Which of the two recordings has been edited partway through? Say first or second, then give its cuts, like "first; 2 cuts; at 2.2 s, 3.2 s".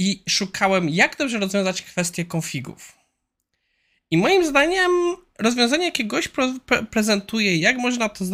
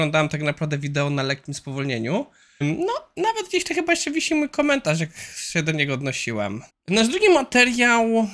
second; 2 cuts; at 2.6 s, 6.7 s